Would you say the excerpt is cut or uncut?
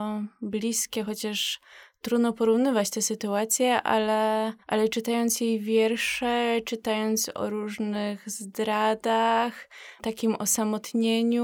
cut